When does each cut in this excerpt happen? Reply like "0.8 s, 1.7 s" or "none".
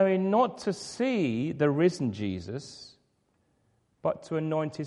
none

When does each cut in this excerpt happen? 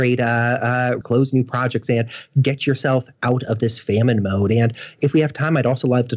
1.0 s

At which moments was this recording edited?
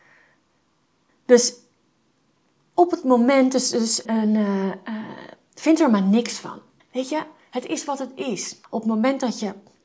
4.0 s, 6.8 s

